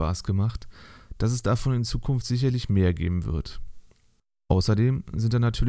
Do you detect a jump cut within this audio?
no; 0 cuts

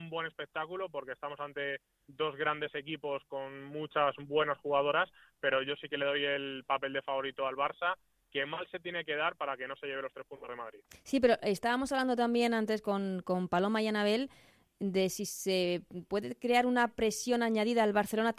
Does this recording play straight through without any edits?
yes; 0 cuts

